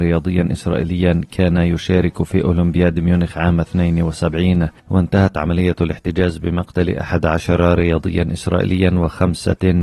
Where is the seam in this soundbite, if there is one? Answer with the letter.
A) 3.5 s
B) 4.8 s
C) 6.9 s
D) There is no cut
B